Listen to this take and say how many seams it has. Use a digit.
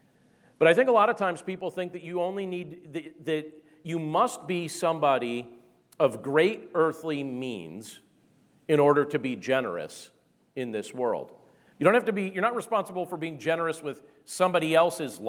1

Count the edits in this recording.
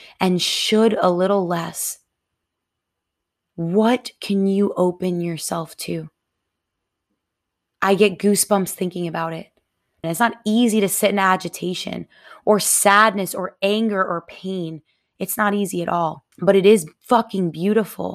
2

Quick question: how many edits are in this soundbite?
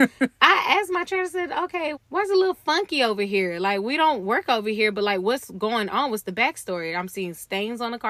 1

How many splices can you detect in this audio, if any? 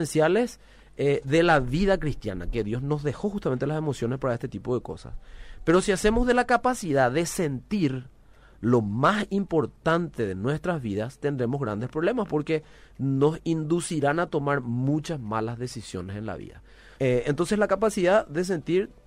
1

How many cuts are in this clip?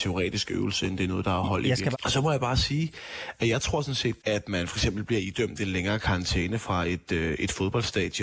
2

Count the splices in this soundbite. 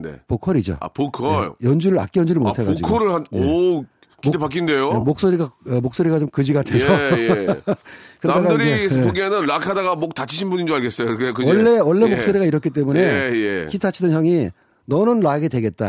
0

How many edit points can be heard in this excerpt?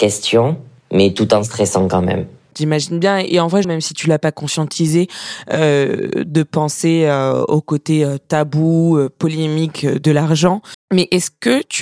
2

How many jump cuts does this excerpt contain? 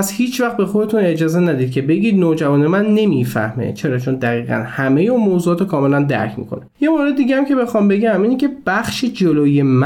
1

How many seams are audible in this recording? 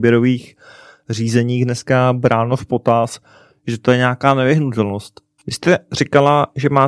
1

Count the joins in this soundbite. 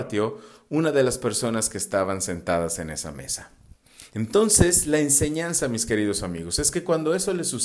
0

